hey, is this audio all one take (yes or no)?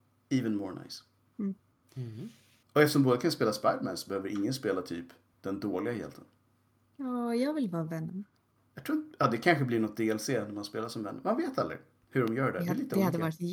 yes